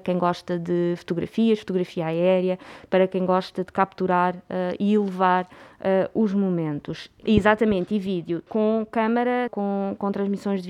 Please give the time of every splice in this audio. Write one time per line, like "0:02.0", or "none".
0:07.2
0:08.5
0:09.5

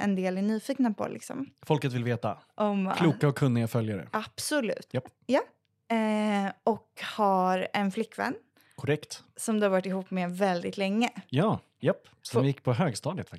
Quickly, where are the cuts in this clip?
0:02.5
0:04.9
0:11.8

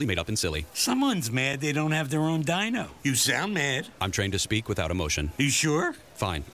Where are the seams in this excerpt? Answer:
0:03.0

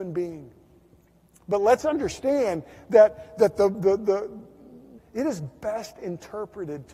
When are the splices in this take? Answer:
0:05.0

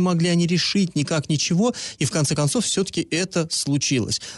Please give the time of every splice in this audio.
none

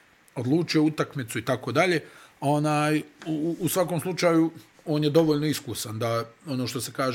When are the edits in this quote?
none

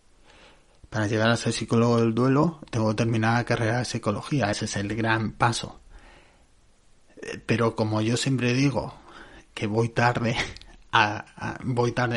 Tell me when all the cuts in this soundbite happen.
none

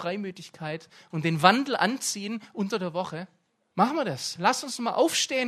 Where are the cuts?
0:03.7

